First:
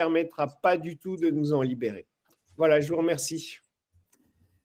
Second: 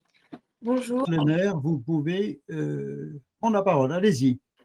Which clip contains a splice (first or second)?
second